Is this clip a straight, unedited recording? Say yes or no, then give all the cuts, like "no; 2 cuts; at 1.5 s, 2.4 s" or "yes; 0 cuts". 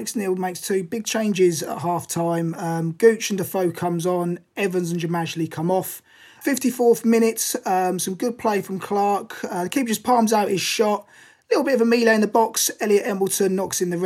yes; 0 cuts